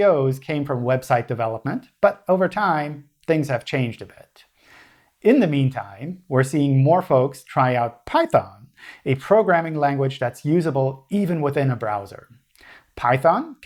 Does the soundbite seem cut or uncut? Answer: uncut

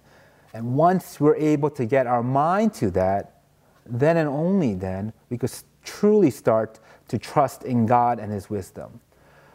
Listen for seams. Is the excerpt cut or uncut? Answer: uncut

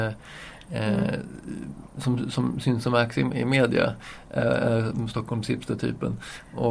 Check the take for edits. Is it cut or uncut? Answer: uncut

